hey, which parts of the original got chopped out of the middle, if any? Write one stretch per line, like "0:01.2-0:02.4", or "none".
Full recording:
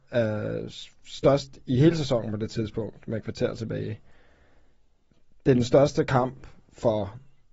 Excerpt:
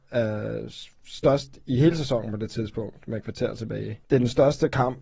0:04.0-0:05.4